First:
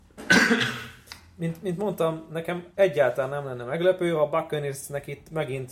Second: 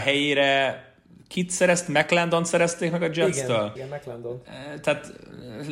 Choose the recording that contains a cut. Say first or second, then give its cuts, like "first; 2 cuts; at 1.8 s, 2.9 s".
second; 1 cut; at 3.8 s